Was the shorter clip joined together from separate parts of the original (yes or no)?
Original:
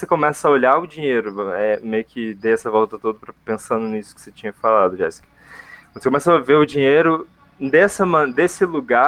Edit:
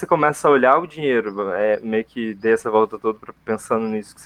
no